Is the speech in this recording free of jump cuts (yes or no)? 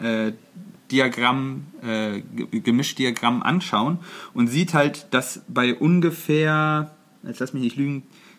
yes